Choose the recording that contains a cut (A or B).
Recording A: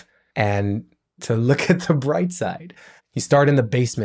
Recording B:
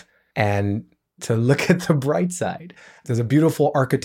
A